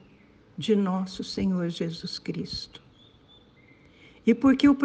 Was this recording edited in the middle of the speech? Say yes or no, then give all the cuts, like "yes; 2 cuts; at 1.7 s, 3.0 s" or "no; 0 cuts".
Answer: no; 0 cuts